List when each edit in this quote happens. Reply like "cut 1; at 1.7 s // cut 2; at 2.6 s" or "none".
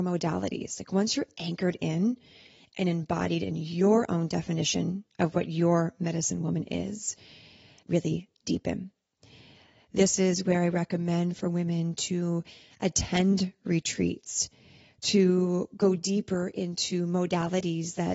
cut 1; at 7.8 s